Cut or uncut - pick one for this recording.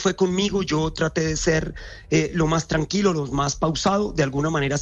uncut